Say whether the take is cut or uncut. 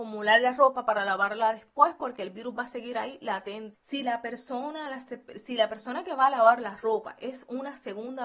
cut